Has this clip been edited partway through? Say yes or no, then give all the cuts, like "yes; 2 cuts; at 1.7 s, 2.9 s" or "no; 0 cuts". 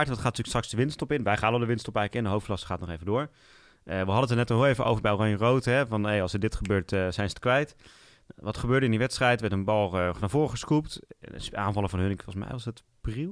no; 0 cuts